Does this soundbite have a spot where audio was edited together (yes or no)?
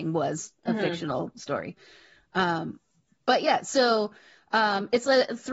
no